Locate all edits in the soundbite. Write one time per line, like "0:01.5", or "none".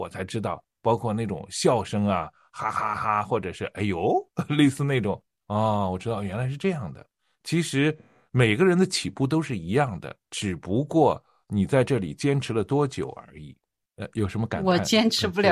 none